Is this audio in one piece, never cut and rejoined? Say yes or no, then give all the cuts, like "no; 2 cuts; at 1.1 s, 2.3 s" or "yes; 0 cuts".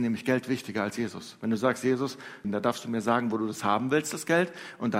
no; 1 cut; at 2.4 s